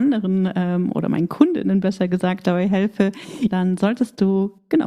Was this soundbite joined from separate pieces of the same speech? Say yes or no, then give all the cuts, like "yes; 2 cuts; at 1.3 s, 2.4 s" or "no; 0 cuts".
yes; 1 cut; at 3.5 s